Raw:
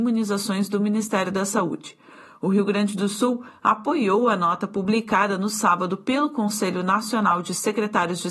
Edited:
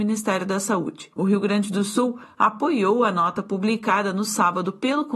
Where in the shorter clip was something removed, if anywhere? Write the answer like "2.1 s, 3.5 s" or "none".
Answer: 1.1 s